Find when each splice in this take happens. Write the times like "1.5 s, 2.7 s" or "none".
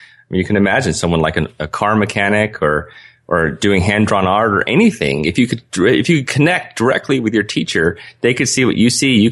none